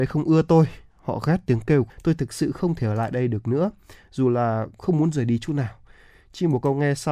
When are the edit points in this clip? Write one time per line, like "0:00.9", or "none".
0:01.9